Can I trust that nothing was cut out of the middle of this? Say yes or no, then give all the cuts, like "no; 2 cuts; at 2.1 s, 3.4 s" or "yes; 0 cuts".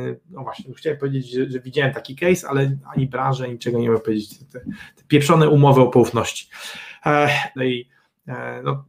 no; 1 cut; at 7.6 s